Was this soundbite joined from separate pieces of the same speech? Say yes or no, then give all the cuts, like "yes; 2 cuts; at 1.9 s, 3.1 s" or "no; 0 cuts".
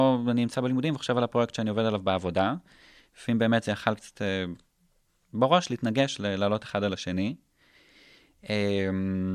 no; 0 cuts